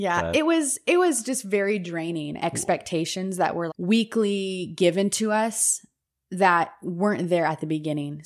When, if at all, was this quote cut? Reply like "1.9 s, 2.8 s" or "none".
2.4 s, 3.7 s

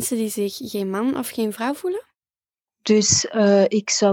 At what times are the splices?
2.7 s

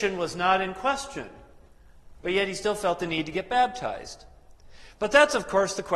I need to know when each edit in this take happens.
none

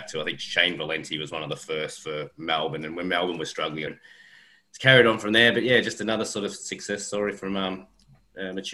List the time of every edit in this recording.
3.9 s

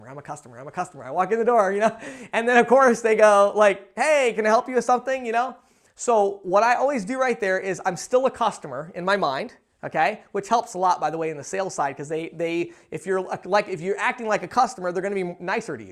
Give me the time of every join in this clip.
none

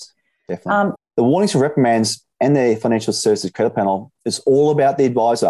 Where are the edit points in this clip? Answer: 1.0 s

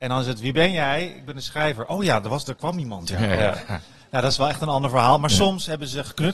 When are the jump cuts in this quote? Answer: none

